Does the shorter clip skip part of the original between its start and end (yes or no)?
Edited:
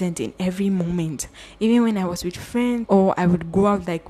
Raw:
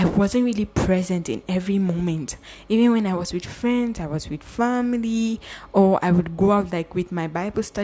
yes